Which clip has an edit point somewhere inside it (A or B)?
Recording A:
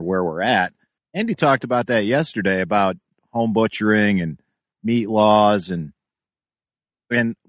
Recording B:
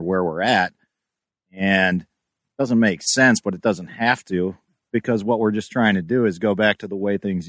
A